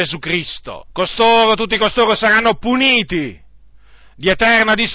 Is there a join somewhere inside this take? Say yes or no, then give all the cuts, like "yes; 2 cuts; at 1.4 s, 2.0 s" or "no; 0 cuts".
yes; 1 cut; at 0.9 s